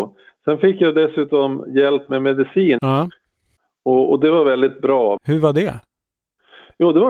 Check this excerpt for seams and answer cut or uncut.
cut